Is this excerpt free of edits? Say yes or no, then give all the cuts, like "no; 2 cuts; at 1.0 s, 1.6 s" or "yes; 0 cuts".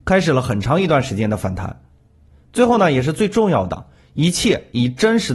yes; 0 cuts